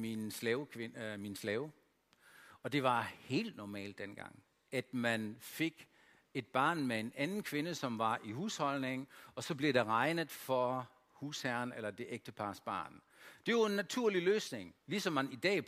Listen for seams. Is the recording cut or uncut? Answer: uncut